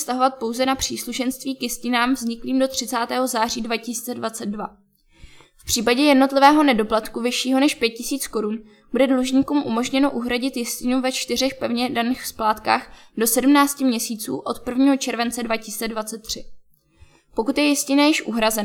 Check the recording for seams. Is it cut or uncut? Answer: uncut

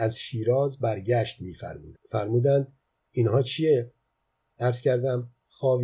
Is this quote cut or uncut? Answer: cut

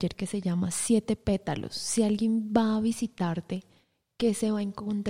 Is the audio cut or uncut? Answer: uncut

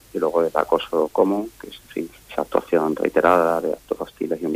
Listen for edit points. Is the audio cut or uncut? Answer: cut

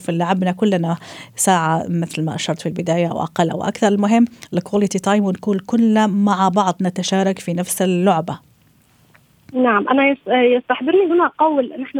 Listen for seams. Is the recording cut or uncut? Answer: uncut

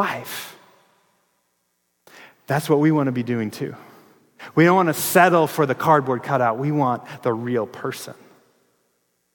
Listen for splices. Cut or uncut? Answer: uncut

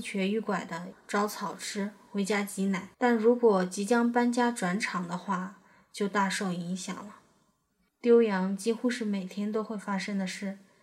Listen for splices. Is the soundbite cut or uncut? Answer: cut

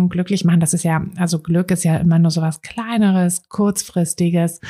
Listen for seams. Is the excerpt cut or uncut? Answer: uncut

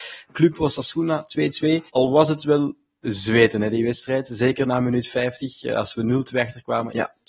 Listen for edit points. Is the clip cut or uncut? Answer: cut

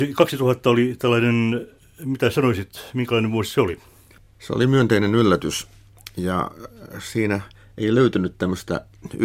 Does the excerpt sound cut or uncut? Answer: uncut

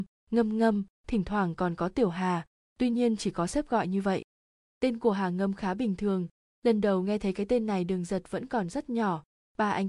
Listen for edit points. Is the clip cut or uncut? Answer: uncut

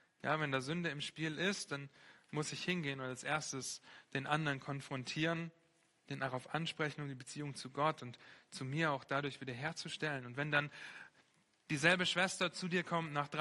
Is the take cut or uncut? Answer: uncut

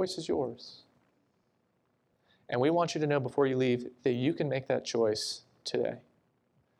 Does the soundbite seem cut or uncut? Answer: uncut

